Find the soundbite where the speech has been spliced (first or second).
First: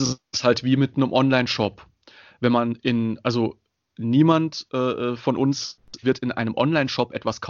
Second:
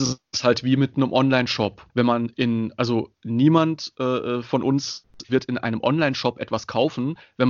second